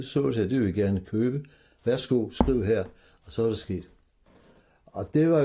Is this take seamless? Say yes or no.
yes